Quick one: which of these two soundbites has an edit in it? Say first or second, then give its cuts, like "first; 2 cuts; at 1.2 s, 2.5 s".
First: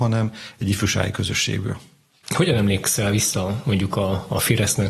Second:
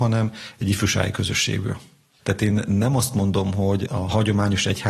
second; 1 cut; at 2.2 s